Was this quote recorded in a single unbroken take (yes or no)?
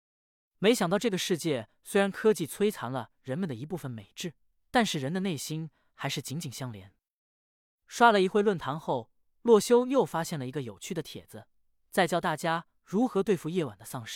yes